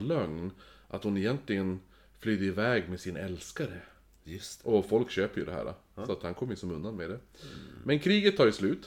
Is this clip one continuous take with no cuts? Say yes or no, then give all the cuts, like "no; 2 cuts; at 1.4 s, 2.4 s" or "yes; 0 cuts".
yes; 0 cuts